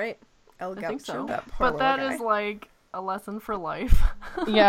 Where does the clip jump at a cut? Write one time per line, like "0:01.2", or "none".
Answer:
0:01.3